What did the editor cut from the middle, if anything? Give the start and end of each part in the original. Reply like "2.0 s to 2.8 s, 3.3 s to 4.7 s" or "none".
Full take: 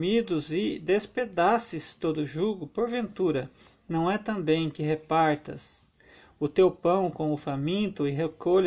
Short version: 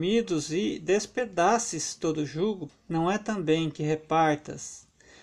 2.7 s to 3.7 s